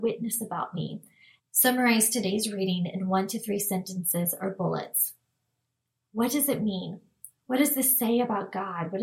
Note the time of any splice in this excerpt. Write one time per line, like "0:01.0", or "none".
0:01.4